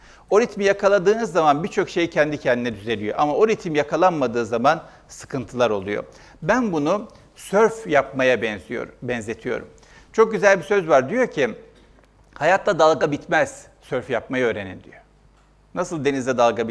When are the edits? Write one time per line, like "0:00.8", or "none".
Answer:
none

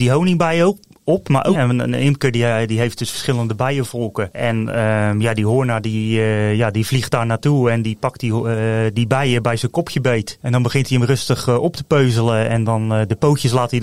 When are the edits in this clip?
0:01.6

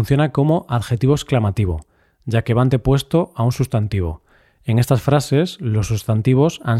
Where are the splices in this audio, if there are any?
none

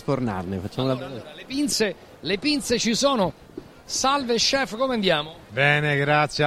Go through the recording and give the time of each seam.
none

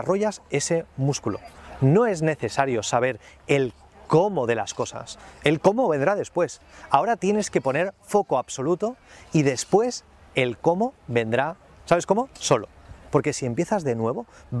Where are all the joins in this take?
0:13.1

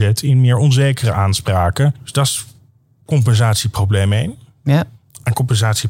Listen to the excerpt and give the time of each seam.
0:02.0

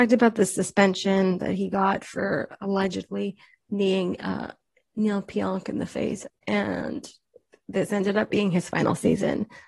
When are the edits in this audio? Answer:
0:06.3

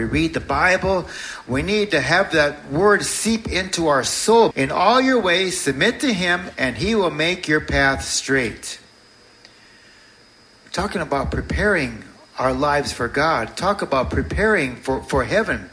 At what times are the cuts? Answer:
0:04.5

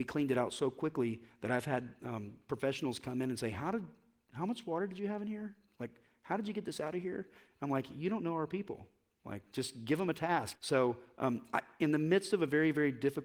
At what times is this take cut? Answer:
0:10.5

